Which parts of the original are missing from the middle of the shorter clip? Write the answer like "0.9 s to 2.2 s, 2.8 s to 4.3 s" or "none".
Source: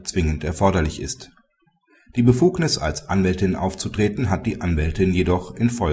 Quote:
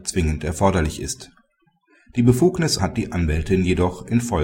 2.8 s to 4.3 s

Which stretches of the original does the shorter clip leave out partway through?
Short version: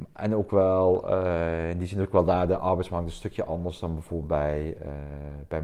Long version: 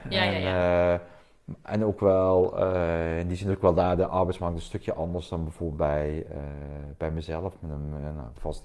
none

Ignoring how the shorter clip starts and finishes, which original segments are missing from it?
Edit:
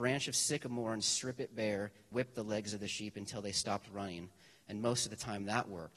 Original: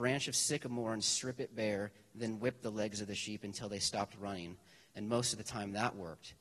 2.1 s to 2.4 s

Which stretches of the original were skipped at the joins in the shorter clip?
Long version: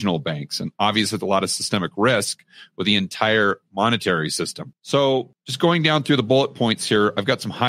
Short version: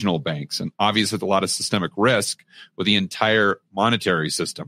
none

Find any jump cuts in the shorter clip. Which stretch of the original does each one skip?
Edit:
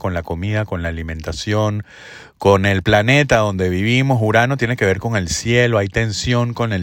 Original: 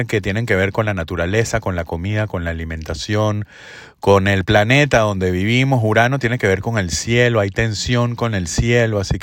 none

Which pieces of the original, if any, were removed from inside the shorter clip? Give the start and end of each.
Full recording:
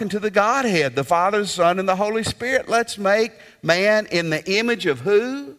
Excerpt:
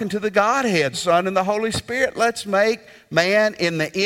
0.9 s to 1.4 s

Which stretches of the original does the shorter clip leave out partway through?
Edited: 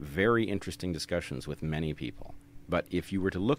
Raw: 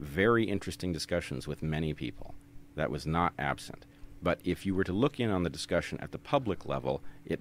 2.6 s to 4.2 s

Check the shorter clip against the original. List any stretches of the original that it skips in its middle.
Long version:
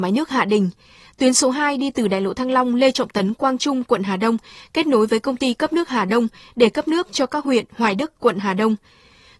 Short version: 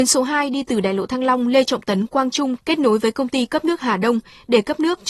3.8 s to 4.7 s

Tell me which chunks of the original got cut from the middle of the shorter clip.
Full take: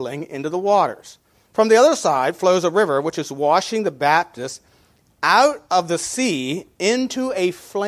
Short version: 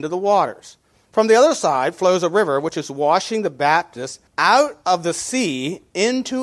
4.7 s to 5.1 s

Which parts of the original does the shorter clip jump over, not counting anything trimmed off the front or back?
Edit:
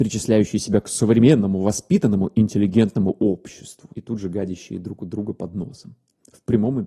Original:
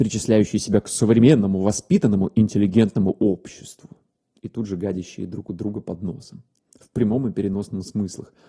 3.9 s to 4.4 s

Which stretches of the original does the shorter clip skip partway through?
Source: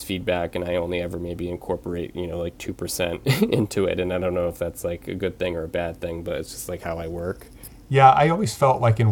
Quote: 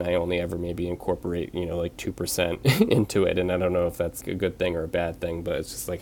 4.8 s to 5.0 s

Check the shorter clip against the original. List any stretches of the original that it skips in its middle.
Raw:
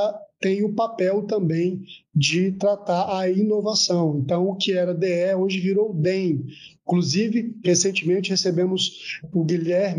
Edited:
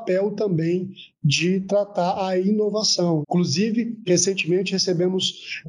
4.1 s to 6.8 s

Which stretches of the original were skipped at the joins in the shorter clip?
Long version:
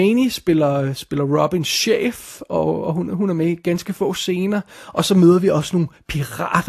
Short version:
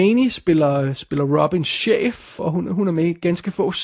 2.4 s to 2.8 s

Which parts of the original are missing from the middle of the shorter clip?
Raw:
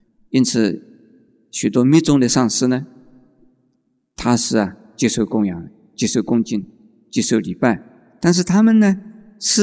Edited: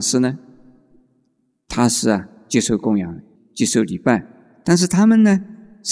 5.8 s to 6.9 s

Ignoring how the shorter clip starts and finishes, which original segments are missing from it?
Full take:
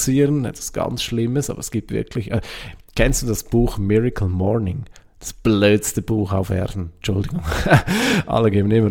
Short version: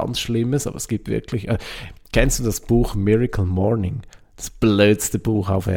none

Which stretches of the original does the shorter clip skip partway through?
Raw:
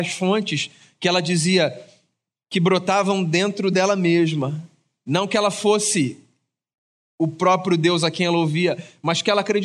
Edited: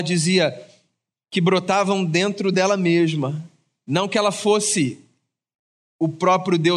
none

